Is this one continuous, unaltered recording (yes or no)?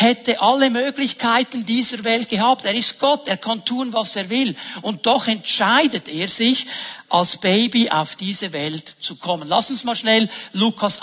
yes